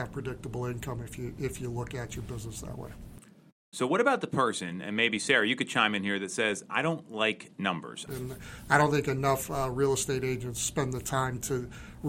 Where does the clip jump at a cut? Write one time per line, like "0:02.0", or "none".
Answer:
0:08.1